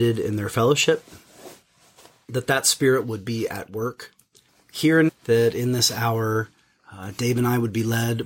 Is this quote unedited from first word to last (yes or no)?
no